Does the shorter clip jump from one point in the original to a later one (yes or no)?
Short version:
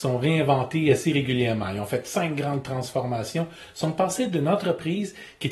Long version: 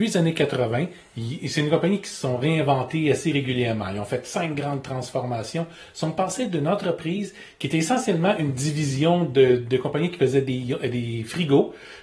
no